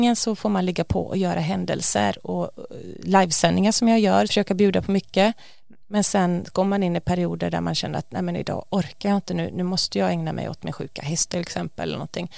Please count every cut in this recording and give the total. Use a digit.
2